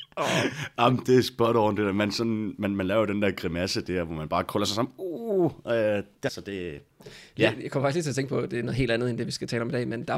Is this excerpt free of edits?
no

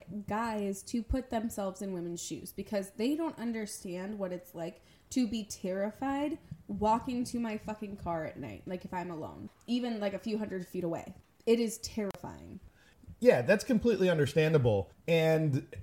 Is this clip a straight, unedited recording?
yes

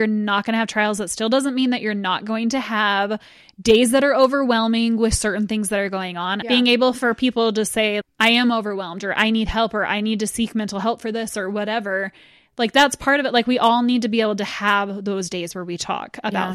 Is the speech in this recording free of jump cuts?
no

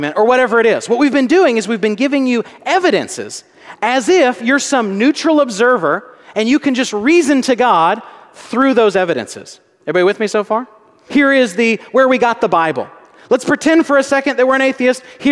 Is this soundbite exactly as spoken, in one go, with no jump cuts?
no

